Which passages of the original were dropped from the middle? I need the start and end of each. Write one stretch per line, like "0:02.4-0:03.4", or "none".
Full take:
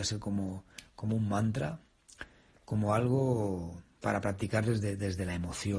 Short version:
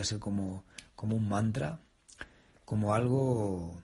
none